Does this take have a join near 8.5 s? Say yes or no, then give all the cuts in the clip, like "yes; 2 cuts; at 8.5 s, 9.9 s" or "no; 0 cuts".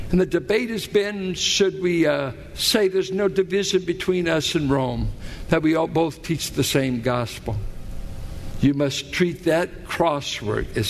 yes; 1 cut; at 8.5 s